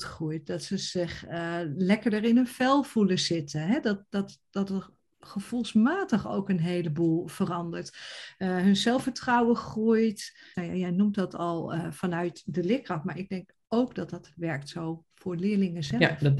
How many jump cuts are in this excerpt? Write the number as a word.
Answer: one